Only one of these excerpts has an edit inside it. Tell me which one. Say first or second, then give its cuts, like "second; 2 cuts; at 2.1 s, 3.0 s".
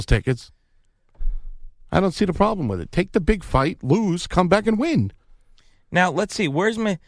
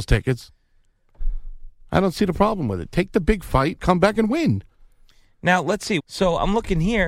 second; 2 cuts; at 3.8 s, 6.0 s